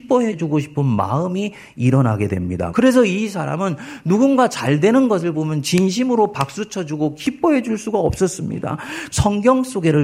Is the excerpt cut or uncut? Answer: cut